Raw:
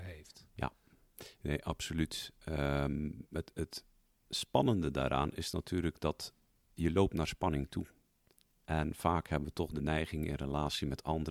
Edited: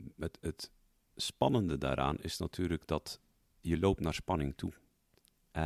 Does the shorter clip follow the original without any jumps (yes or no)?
yes